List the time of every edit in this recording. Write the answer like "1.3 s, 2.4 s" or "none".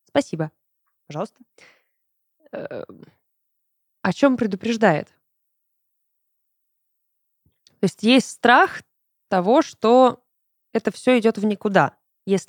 3.9 s